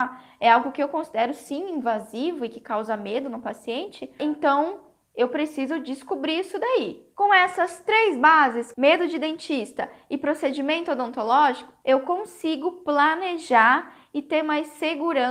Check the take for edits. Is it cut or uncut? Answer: cut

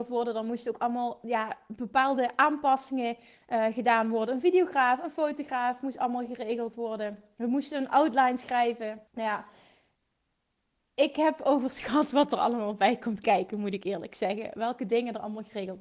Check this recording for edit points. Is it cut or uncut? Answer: cut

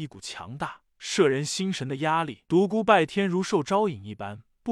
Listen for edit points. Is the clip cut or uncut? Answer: cut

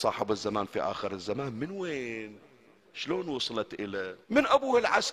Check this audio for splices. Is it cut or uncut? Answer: cut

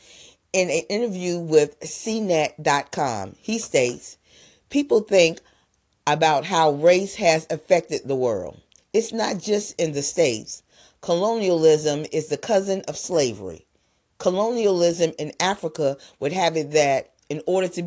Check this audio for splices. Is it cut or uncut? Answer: uncut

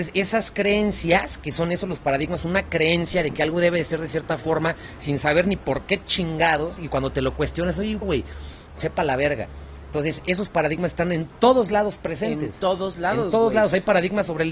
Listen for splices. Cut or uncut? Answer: cut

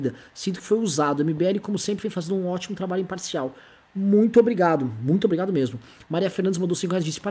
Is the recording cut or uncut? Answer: uncut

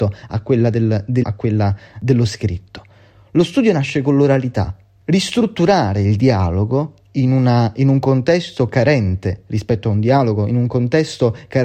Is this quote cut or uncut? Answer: cut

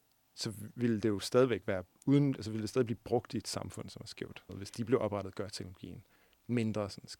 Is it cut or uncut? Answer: cut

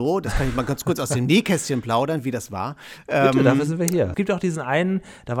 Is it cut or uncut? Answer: cut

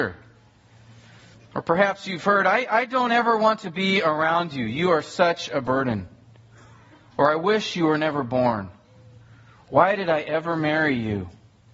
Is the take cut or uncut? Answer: cut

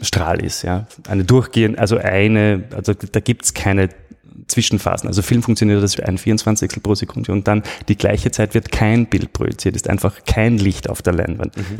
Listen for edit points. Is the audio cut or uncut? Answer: cut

